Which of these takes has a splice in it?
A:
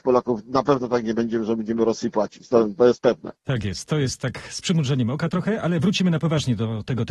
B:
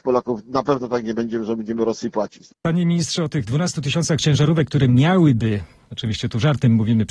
B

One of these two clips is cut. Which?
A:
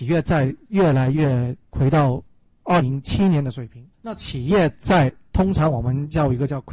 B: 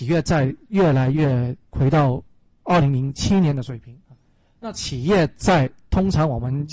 A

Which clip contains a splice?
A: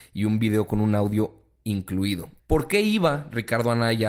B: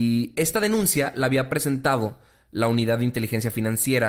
A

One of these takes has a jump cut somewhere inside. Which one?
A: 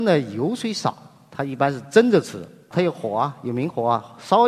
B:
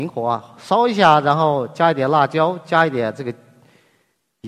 A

